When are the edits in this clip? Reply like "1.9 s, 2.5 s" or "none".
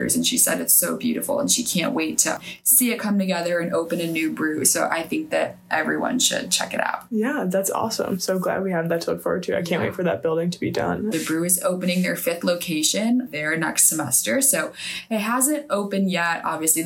11.1 s